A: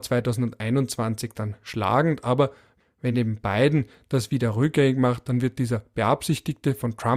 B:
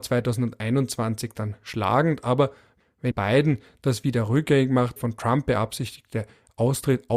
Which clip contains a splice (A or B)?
B